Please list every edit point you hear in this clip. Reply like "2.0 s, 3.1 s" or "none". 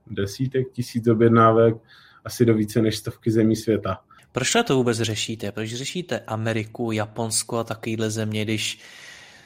4.2 s